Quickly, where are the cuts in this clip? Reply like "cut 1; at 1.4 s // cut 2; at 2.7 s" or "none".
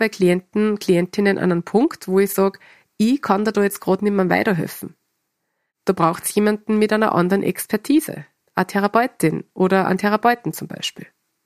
none